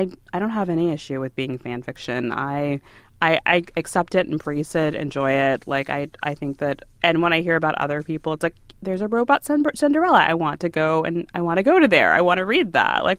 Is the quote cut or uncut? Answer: uncut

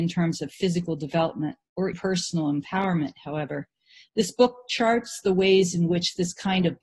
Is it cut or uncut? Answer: cut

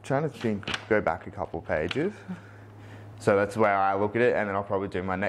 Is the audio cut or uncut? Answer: cut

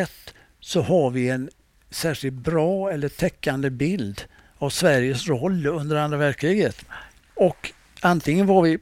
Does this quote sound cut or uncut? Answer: uncut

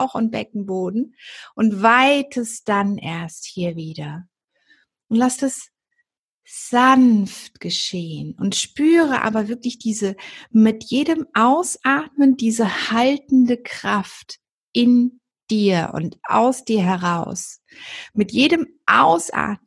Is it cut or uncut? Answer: uncut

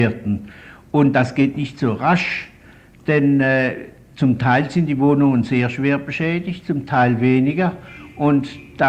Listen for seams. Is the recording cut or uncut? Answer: uncut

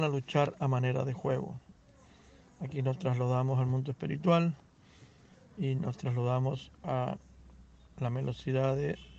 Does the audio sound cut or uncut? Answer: uncut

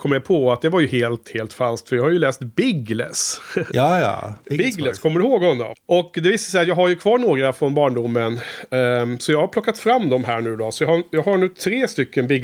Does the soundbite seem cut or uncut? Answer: cut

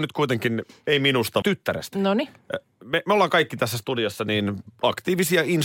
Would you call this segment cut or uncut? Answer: cut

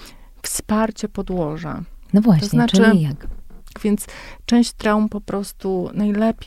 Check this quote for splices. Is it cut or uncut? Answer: cut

